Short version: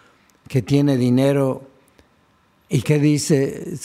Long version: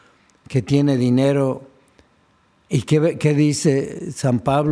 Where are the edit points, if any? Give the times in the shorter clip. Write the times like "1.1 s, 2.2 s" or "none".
2.8 s